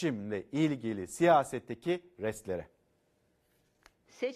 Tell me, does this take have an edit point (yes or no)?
no